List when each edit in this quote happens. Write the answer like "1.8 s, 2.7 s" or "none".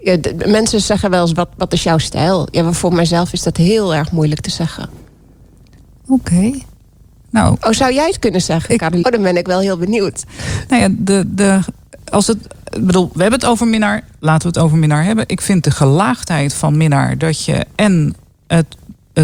9.0 s